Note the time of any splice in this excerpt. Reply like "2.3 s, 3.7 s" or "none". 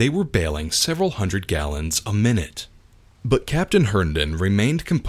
3.1 s

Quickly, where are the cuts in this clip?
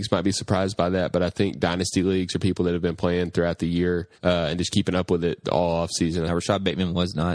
4.1 s, 6.3 s

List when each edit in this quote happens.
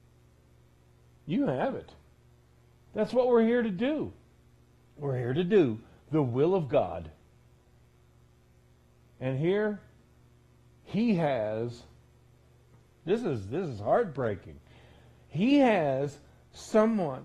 2.9 s

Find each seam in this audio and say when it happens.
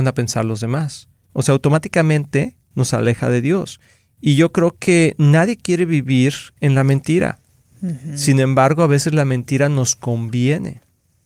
1.3 s

